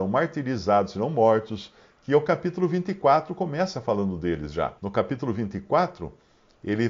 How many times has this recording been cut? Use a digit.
1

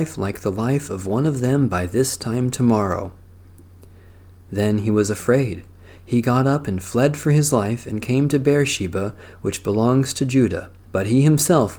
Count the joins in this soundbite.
1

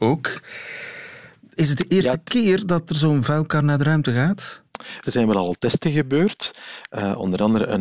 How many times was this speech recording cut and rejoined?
1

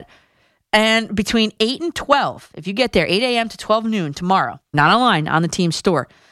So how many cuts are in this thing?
1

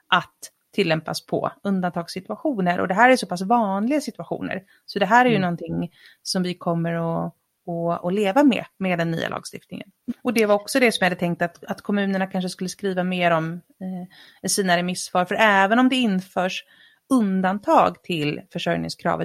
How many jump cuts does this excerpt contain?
1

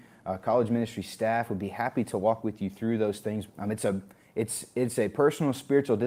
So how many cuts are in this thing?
1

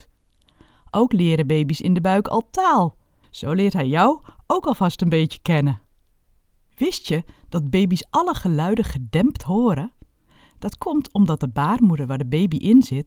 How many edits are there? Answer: 1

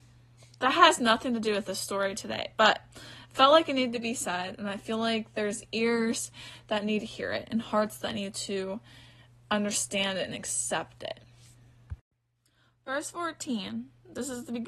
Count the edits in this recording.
0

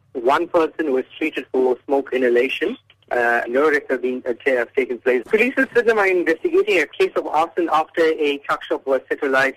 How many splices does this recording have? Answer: 2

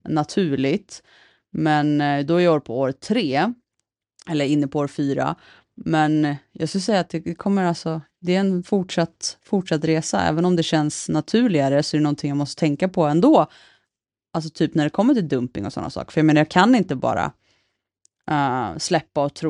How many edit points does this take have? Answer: 0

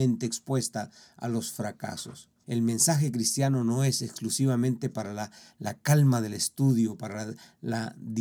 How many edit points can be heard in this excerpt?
1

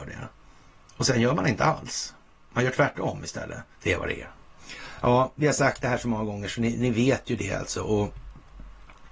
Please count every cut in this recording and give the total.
1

